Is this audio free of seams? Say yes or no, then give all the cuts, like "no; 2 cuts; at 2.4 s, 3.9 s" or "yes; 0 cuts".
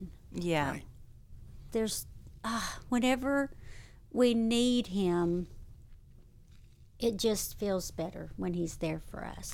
no; 1 cut; at 1.7 s